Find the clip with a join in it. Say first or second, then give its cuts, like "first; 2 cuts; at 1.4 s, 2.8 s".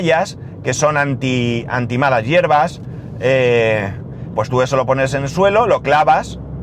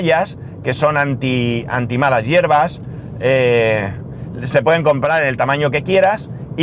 first; 1 cut; at 4.3 s